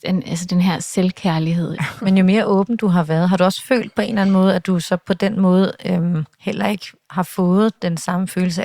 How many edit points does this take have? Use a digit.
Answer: 2